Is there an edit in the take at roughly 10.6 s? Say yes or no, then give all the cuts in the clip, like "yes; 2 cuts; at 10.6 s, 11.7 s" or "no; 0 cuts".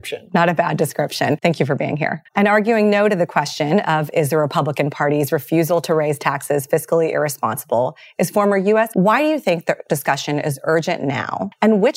no; 2 cuts; at 2.3 s, 8.9 s